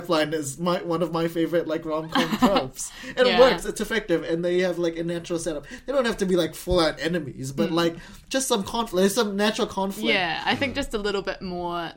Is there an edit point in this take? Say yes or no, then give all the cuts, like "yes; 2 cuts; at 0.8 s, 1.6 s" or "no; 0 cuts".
no; 0 cuts